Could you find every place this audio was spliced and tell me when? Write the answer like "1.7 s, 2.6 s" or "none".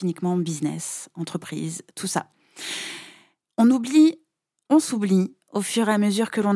none